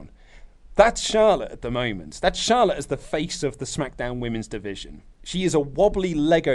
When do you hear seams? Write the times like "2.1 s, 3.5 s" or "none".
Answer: 5.1 s